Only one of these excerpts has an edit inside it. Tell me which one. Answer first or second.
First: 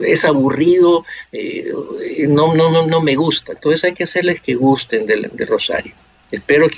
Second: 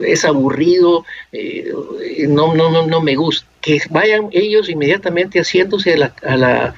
second